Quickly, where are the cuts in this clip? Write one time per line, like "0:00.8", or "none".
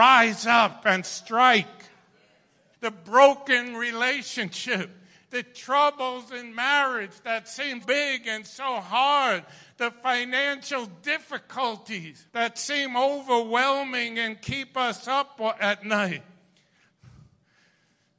0:02.7
0:07.8
0:12.3